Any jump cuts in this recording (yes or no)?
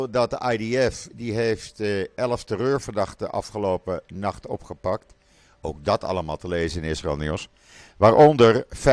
no